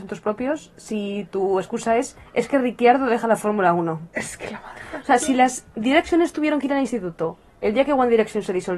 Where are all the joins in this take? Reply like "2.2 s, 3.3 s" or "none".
none

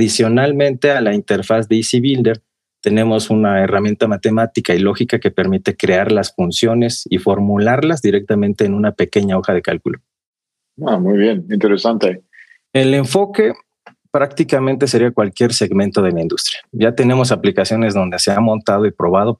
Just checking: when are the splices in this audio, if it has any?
12.7 s

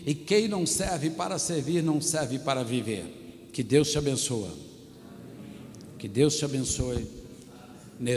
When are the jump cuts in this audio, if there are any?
none

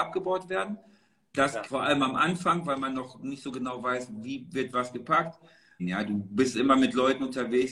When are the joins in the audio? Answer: 1.6 s, 5.8 s

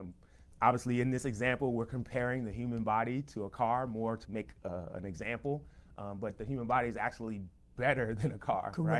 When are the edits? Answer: 4.2 s

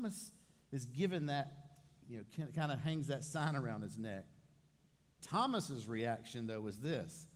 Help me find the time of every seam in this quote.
5.2 s

